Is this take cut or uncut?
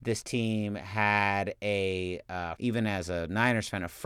cut